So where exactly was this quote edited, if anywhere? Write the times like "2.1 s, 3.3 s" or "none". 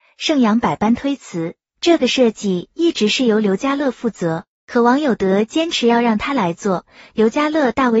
none